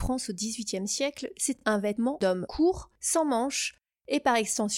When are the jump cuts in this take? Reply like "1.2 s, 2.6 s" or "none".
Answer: none